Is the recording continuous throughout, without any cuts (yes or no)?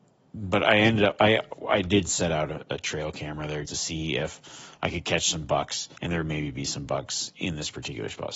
no